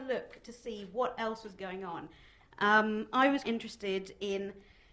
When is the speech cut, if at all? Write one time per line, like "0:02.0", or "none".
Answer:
0:02.4
0:03.4